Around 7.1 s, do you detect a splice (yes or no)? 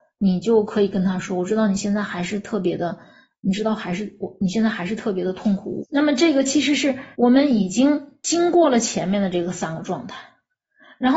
yes